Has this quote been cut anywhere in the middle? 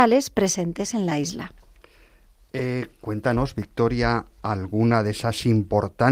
no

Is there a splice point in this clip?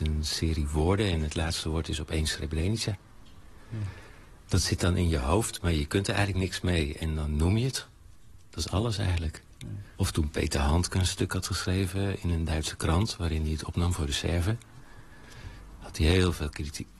yes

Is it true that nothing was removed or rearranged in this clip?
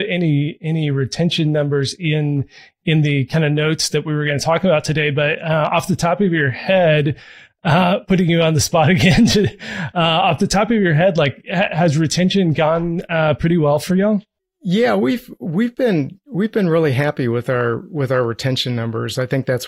yes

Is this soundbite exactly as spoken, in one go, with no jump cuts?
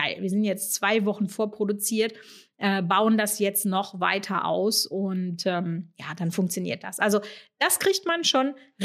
yes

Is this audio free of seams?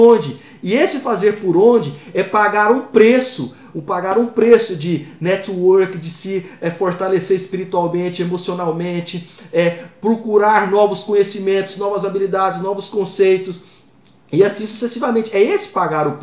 yes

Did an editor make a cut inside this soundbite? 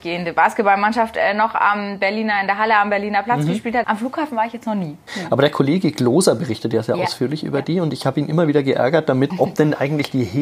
yes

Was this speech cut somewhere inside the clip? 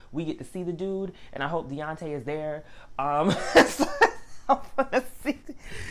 no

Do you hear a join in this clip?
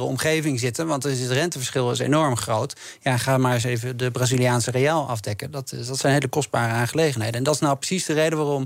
no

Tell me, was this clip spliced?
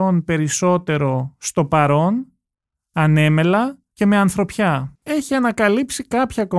yes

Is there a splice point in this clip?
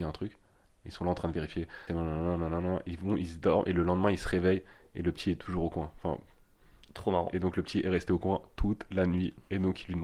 yes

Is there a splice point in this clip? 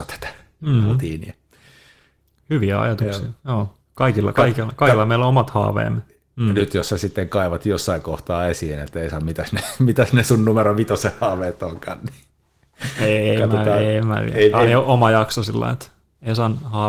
yes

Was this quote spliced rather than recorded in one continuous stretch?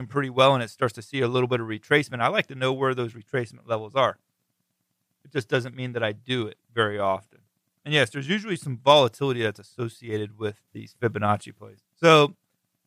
yes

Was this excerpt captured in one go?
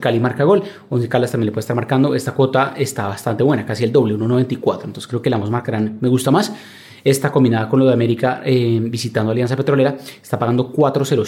yes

